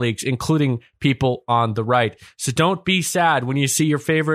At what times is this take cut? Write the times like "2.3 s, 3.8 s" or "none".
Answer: none